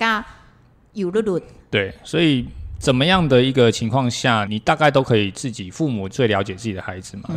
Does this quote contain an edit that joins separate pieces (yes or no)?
yes